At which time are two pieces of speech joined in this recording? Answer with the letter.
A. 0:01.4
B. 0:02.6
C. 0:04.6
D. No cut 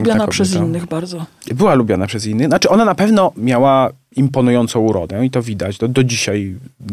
D